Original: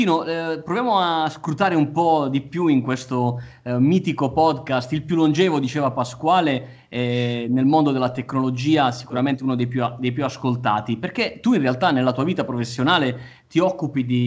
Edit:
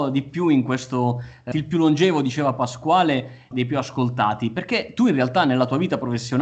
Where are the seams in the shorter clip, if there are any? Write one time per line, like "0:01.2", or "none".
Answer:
0:01.5
0:03.5